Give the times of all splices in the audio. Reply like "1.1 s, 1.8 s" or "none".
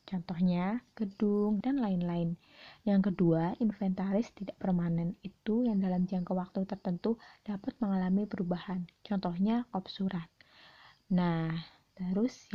1.6 s